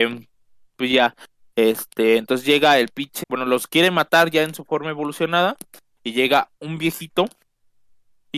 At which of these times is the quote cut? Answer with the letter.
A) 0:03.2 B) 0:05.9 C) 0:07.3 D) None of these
A